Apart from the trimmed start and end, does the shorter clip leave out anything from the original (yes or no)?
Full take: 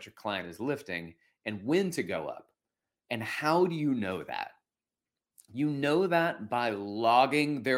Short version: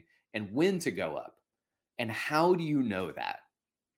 no